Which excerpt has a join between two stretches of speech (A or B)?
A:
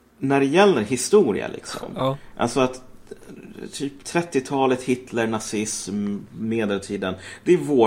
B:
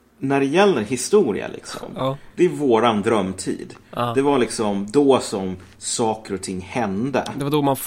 B